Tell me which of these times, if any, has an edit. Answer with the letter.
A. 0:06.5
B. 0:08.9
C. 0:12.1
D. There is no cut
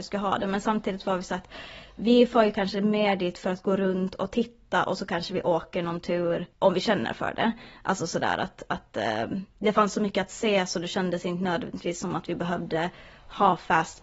A